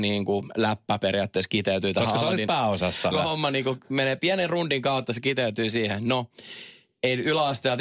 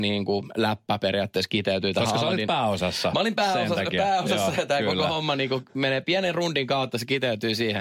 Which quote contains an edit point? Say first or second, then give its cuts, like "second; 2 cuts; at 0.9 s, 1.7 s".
first; 1 cut; at 3.1 s